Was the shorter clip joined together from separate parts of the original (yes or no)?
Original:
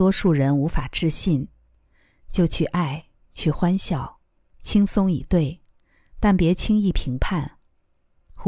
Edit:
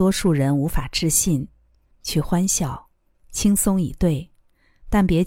yes